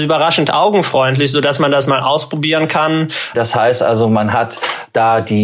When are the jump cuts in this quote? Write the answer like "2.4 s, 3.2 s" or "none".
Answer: 3.3 s